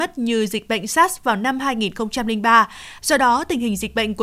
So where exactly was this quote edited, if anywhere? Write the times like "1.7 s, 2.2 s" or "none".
3.0 s